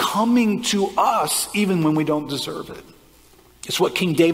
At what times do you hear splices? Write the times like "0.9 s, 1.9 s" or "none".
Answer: none